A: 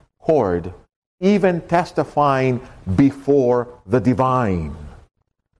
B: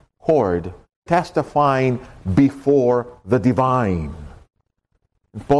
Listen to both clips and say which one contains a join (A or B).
B